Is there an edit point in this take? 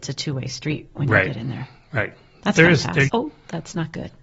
yes; 1 cut; at 3.1 s

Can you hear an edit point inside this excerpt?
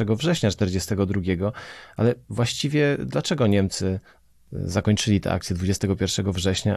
no; 0 cuts

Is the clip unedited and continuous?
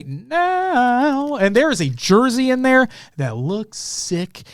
yes; 0 cuts

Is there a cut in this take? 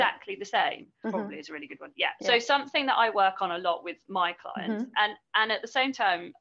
yes; 2 cuts; at 1.0 s, 2.2 s

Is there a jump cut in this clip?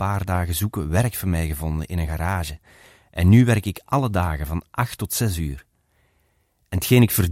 no; 0 cuts

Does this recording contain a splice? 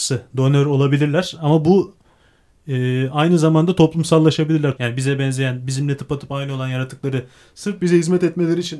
yes; 1 cut; at 4.8 s

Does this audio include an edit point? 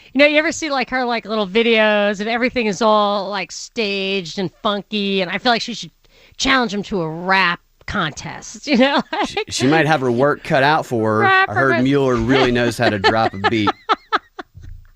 no; 0 cuts

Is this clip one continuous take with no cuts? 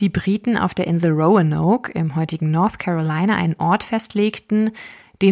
yes; 0 cuts

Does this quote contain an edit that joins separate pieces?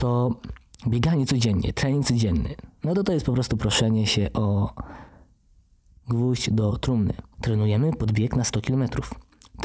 yes; 1 cut; at 7.3 s

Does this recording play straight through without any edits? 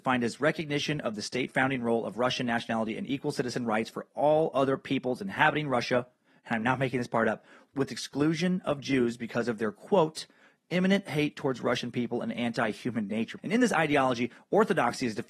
no; 2 cuts; at 7.7 s, 13.4 s

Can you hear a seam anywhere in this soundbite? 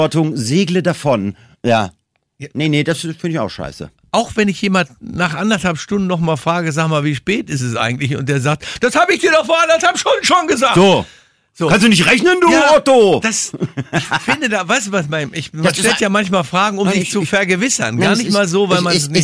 no; 0 cuts

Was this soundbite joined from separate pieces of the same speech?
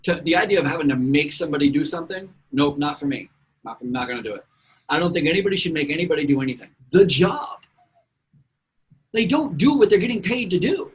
yes; 1 cut; at 6.8 s

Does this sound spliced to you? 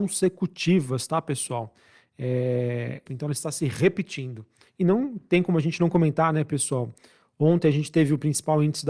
yes; 2 cuts; at 3.1 s, 4.7 s

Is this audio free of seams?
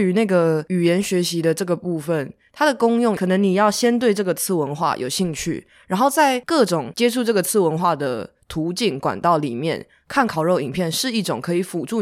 yes; 0 cuts

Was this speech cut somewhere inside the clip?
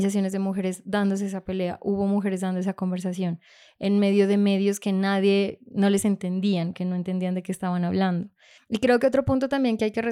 yes; 1 cut; at 8.6 s

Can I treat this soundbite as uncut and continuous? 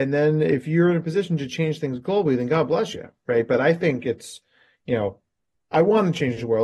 no; 1 cut; at 5.6 s

